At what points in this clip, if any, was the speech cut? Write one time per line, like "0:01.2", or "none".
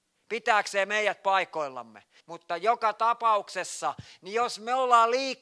0:02.2